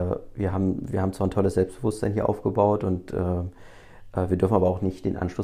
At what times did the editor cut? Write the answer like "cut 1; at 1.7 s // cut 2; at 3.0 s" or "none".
none